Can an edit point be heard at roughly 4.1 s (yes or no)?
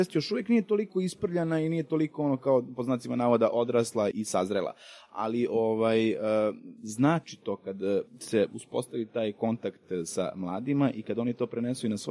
yes